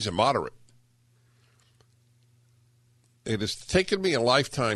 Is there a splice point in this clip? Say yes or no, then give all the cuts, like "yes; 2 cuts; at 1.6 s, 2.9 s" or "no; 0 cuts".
no; 0 cuts